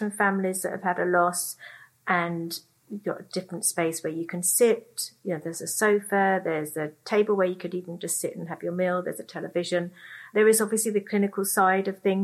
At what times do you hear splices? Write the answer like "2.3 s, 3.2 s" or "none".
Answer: none